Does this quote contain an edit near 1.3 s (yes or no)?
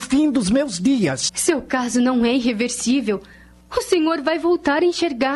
yes